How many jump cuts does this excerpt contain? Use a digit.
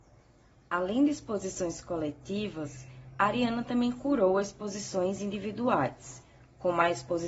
0